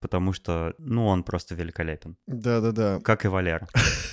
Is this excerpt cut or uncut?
uncut